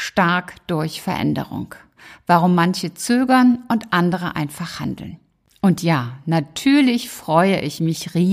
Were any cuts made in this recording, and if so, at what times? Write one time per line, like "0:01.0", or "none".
none